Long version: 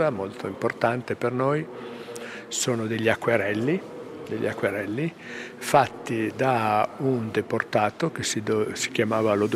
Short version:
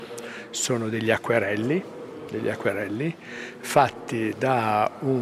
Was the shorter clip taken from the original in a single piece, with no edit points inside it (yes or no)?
yes